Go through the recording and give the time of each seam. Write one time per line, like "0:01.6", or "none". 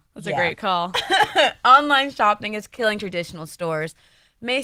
none

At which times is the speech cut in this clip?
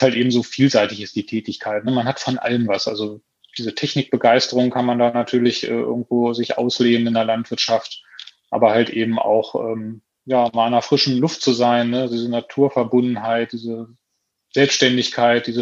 none

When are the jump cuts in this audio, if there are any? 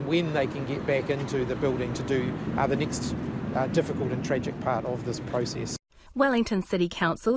none

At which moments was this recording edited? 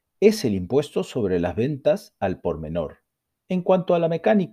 0:03.4

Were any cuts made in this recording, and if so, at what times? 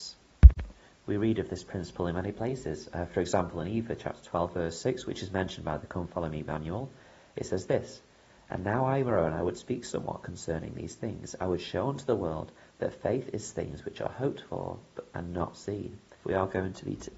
0:16.2

